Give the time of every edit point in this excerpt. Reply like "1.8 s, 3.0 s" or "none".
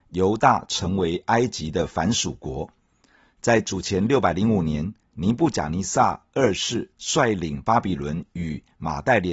none